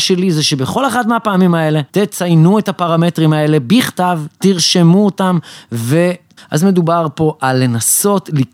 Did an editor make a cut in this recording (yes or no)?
yes